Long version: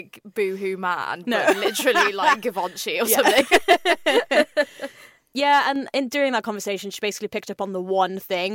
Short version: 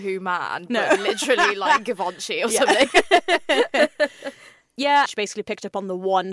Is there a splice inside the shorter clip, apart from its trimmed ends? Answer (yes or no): yes